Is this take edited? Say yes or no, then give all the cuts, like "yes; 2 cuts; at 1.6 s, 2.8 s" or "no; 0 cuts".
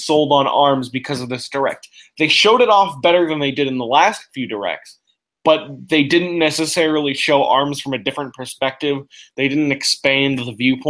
no; 0 cuts